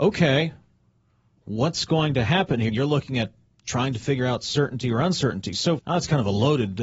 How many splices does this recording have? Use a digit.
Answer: 2